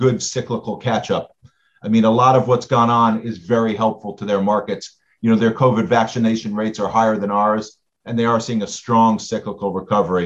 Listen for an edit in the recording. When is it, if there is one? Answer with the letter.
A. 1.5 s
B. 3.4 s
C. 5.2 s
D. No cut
D